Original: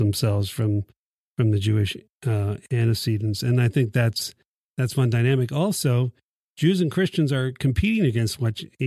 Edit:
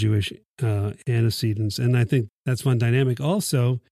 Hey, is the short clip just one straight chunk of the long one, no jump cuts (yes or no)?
no